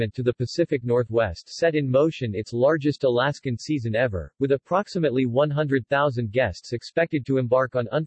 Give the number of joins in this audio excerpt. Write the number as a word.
zero